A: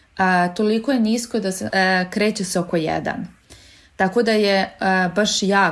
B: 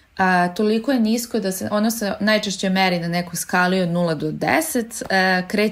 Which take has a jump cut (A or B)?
A